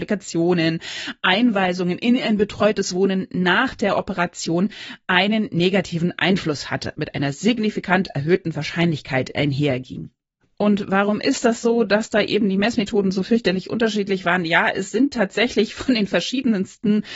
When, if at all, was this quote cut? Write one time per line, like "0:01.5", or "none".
0:06.9

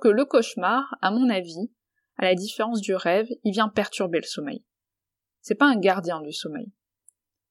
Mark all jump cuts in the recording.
none

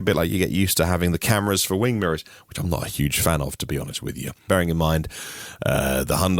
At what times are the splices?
0:04.5

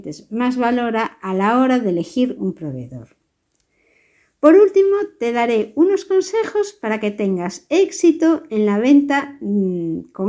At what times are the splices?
none

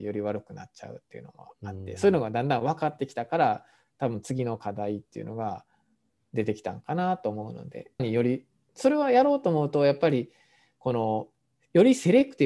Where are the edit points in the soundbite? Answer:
0:08.0

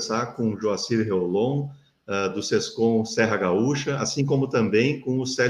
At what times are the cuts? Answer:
none

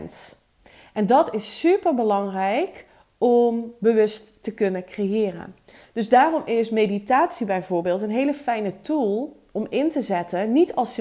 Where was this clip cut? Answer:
none

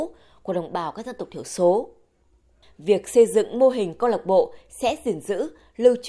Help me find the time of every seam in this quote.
none

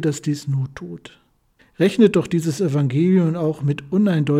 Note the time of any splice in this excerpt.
0:01.6

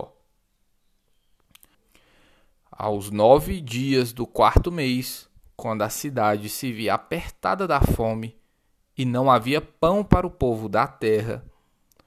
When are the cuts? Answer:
0:01.7

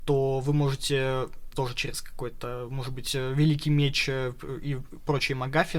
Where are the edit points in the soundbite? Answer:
0:01.5

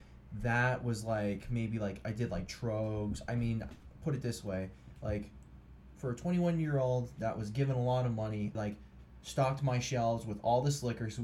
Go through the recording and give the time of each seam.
0:08.5

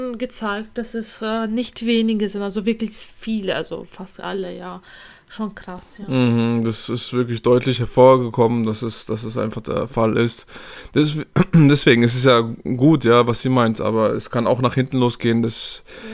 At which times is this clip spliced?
none

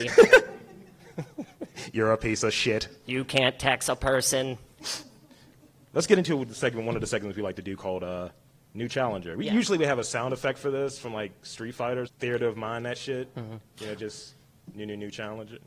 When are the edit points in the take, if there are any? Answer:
0:12.1

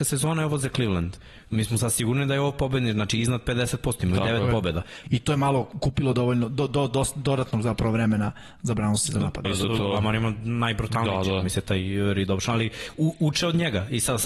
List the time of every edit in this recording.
0:05.0
0:09.4

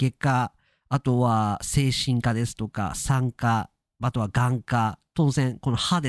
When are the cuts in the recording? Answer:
none

